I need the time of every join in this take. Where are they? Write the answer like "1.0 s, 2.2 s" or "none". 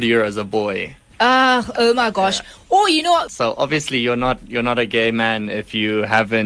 3.3 s